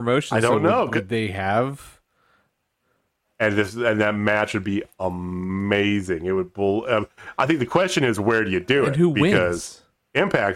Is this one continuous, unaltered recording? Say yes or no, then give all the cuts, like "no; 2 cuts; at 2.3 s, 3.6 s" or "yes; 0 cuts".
no; 1 cut; at 3.2 s